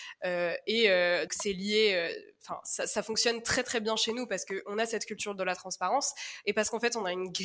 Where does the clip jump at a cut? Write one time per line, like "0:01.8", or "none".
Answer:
0:01.3